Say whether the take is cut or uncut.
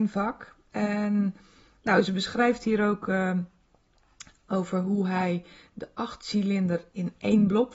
uncut